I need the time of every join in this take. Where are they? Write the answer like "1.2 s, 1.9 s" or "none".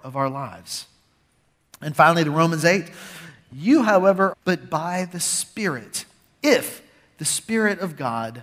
4.3 s